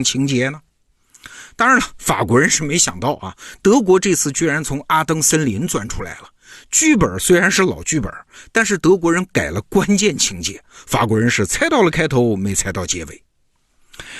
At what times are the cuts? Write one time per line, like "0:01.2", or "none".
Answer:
none